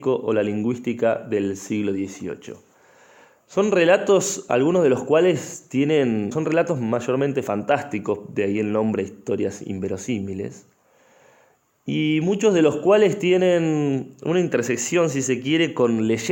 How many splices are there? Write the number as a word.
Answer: one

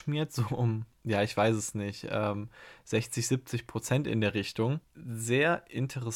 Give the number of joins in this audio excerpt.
one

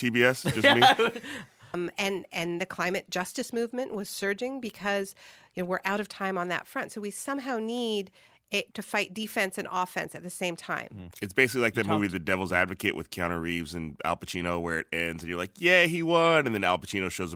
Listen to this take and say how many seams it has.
three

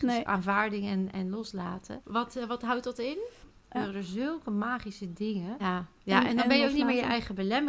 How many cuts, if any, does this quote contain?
three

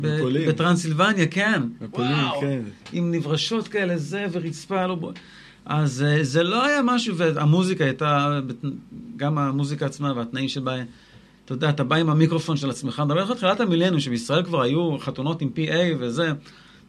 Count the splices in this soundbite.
zero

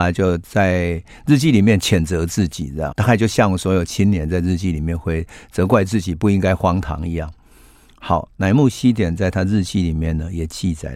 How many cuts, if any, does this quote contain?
one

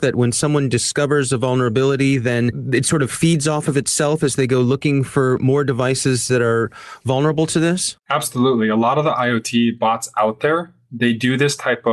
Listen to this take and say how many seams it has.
one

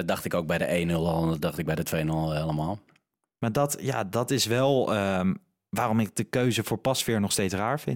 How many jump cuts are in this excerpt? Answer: zero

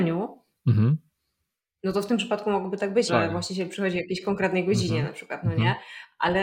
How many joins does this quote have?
one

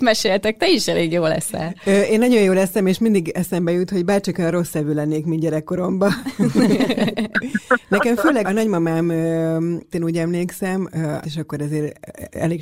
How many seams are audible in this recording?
three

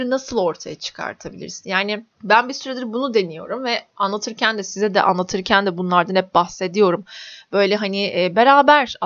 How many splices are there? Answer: one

